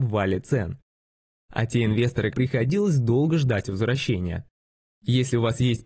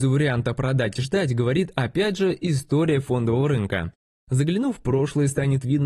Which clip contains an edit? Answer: first; 2 cuts; at 2.3 s, 4.9 s

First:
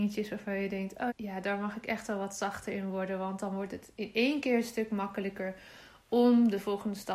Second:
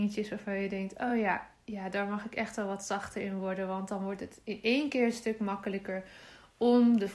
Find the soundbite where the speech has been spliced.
first; 1 cut; at 1.1 s

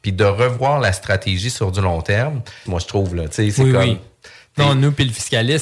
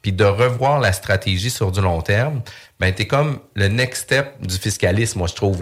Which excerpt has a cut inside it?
first; 1 cut; at 2.7 s

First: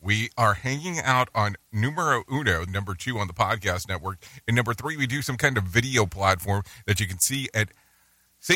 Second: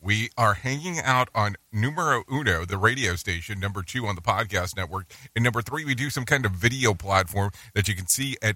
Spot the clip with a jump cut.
first; 1 cut; at 2.7 s

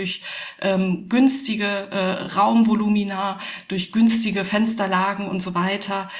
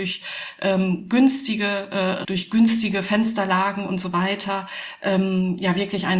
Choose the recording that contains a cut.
second; 1 cut; at 2.2 s

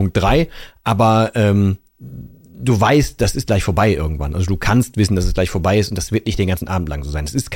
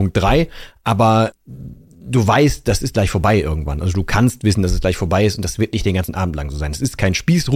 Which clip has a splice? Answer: second; 1 cut; at 1.3 s

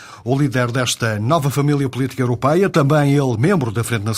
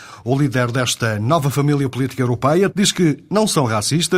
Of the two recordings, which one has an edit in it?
second; 1 cut; at 2.7 s

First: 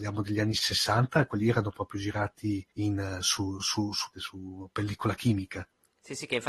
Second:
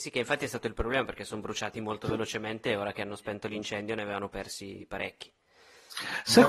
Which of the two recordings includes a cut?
first; 2 cuts; at 2.7 s, 4.1 s

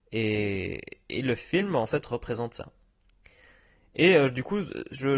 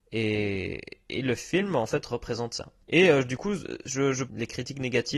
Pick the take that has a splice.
second; 2 cuts; at 2.8 s, 4.3 s

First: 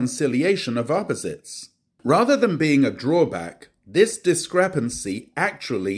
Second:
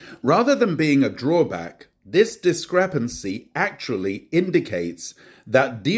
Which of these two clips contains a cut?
first; 1 cut; at 2.0 s

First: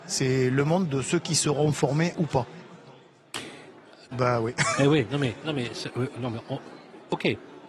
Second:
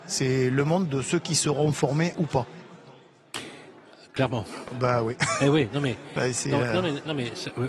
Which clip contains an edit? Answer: first; 2 cuts; at 4.1 s, 5.4 s

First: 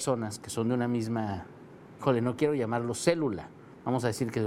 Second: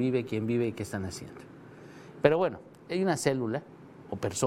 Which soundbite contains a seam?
second; 1 cut; at 2.2 s

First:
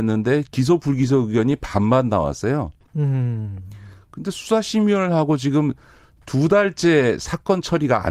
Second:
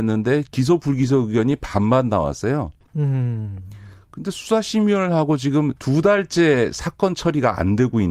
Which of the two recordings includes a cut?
second; 1 cut; at 5.8 s

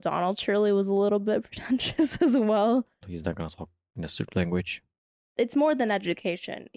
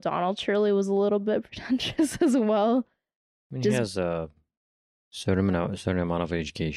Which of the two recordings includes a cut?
first; 1 cut; at 3.0 s

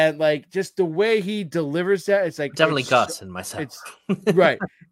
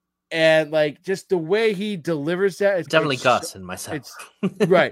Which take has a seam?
second; 1 cut; at 2.8 s

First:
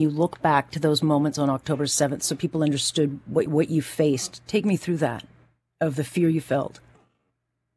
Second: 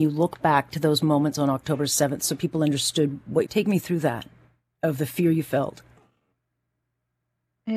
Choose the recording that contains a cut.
second; 1 cut; at 3.5 s

